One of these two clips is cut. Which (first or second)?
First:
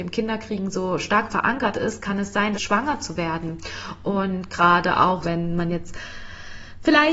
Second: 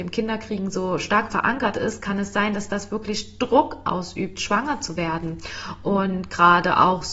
first